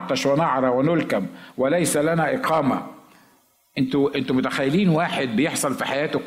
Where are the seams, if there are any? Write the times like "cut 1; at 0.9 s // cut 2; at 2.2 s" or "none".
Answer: none